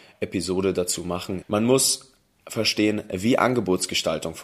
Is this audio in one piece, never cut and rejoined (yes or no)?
no